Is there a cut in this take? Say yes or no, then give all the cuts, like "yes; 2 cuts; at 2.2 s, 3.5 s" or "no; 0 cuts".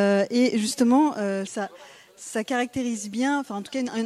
yes; 1 cut; at 1.5 s